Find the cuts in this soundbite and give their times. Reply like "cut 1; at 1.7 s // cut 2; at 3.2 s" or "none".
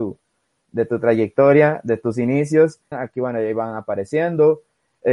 cut 1; at 2.9 s